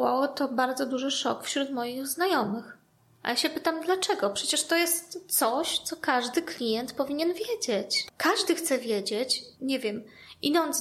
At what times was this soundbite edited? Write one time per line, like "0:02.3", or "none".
0:08.1
0:09.5